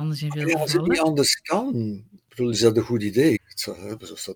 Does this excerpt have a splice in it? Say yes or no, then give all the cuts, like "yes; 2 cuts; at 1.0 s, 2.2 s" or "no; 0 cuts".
yes; 1 cut; at 3.4 s